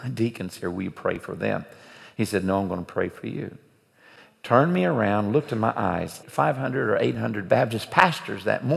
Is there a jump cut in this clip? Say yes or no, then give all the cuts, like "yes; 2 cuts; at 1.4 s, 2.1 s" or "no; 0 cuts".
yes; 1 cut; at 6.2 s